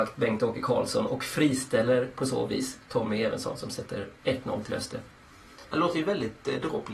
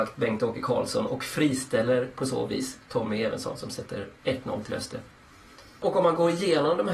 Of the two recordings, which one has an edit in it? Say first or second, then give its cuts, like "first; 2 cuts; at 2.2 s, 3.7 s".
second; 1 cut; at 5.6 s